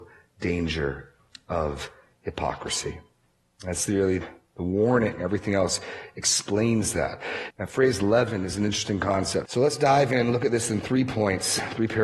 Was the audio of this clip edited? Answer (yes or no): yes